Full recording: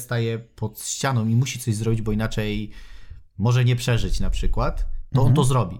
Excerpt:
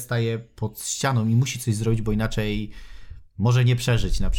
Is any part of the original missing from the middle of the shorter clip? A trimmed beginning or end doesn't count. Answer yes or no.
no